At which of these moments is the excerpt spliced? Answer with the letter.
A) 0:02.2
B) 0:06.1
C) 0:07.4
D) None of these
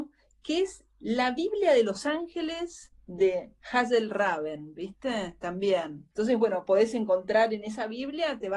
B